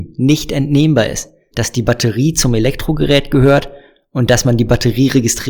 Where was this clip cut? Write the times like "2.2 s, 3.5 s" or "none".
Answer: 1.5 s